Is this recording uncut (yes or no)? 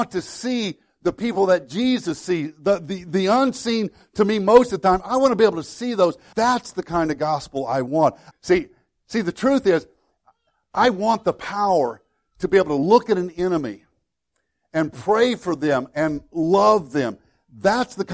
no